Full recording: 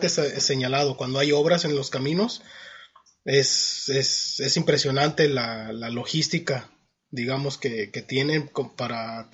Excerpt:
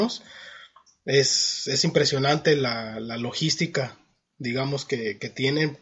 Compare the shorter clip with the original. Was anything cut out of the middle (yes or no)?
yes